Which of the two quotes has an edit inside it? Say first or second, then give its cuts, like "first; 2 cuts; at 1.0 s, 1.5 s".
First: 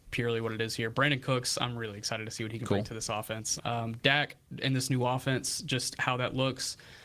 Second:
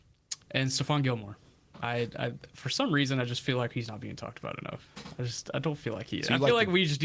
first; 1 cut; at 3.6 s